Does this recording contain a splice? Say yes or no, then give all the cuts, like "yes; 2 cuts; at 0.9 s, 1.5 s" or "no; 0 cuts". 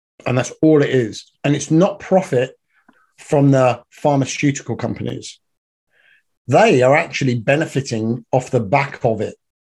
no; 0 cuts